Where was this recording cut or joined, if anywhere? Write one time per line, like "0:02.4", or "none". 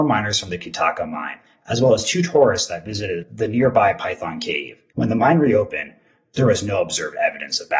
0:04.9